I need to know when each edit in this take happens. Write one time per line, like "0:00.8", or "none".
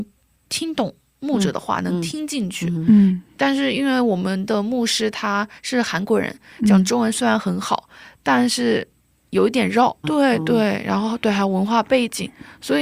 0:10.0